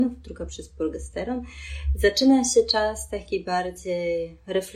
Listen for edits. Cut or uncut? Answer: uncut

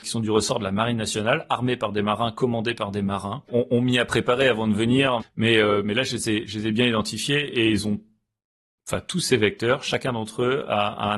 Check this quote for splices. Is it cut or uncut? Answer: cut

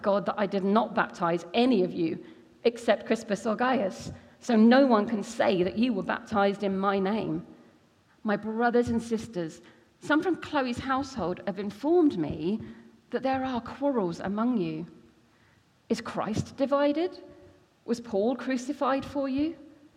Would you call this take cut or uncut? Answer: cut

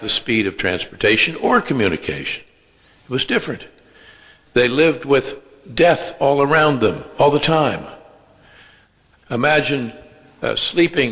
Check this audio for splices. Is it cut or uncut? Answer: cut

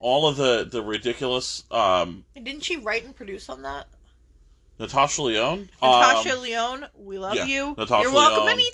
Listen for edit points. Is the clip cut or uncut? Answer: cut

